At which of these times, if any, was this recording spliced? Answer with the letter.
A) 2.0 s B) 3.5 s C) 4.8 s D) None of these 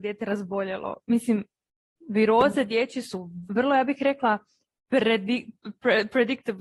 B